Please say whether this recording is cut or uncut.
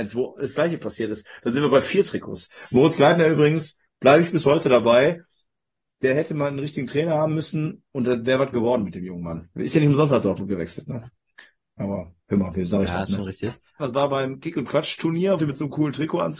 cut